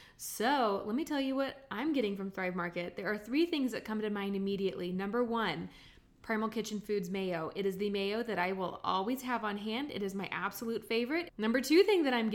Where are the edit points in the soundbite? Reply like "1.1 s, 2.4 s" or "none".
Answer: 11.3 s